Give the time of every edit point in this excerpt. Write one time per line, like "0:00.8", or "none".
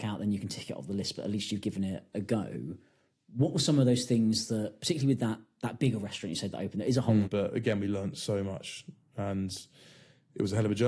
0:07.2